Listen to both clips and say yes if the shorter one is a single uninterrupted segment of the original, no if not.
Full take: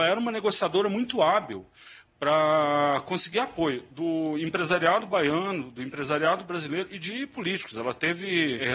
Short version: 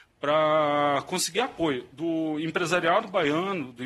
yes